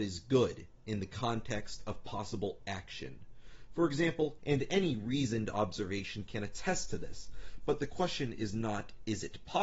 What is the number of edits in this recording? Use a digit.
1